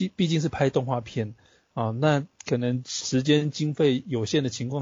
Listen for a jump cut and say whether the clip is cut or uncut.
uncut